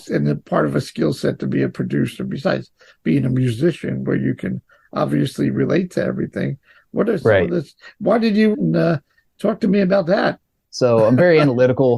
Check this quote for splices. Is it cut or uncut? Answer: cut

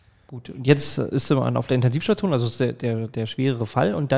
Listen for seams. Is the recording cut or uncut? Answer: uncut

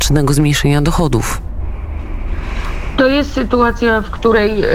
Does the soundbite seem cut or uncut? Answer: uncut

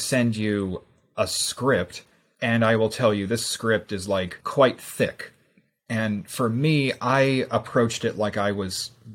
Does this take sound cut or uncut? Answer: uncut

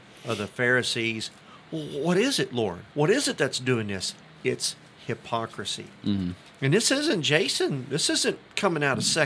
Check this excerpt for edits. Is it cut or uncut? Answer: cut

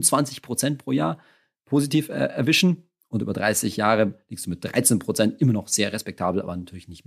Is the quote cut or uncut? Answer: uncut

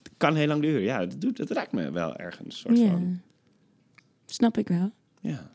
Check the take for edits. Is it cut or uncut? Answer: uncut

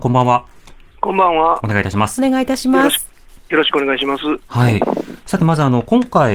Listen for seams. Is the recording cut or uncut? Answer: uncut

